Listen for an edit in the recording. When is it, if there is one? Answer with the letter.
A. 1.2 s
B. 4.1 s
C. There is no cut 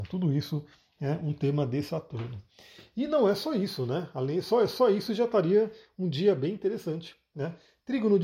C